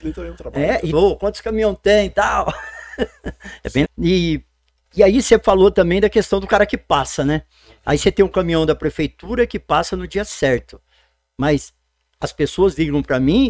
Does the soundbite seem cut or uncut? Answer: cut